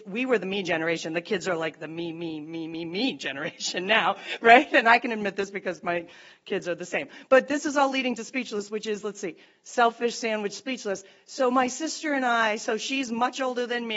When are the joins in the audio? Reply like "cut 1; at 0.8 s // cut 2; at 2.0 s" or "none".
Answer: none